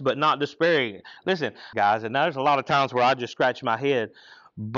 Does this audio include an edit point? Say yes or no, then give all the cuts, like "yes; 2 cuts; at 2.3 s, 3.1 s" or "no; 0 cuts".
yes; 1 cut; at 1.7 s